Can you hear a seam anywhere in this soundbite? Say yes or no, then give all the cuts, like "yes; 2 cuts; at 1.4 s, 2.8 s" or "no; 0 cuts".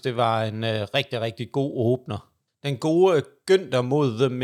yes; 1 cut; at 2.5 s